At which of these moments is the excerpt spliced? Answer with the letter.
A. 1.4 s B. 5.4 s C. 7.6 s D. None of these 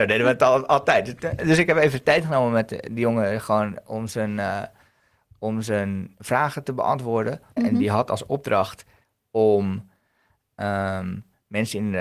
C